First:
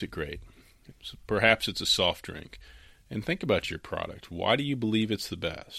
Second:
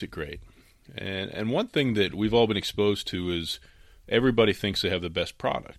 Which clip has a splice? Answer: first; 2 cuts; at 0.9 s, 2.9 s

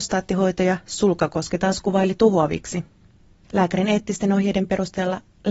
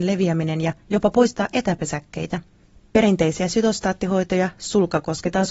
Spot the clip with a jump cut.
first; 1 cut; at 3.4 s

